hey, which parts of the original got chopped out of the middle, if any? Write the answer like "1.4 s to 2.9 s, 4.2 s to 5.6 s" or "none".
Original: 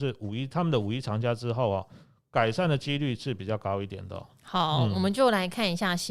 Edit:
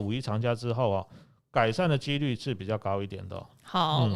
none